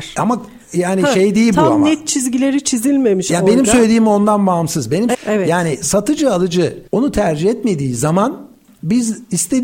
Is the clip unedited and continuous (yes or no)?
no